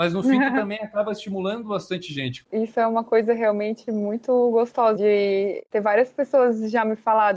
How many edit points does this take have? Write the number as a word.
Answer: two